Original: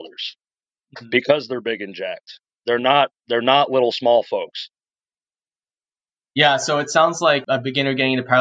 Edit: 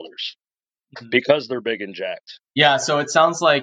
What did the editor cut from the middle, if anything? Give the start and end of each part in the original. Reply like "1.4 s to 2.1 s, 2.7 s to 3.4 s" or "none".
2.5 s to 6.3 s